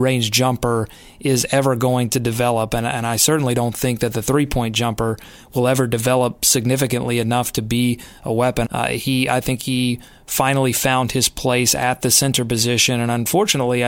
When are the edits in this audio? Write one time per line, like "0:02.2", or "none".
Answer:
0:08.6